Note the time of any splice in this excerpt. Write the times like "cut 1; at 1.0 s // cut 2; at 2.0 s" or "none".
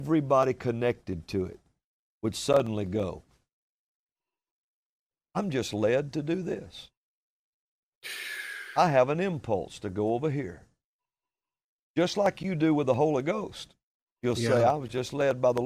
none